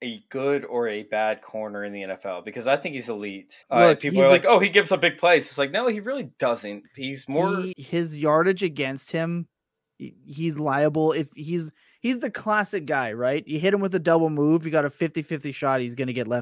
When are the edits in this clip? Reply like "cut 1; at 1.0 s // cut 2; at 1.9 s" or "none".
cut 1; at 3.6 s // cut 2; at 7.7 s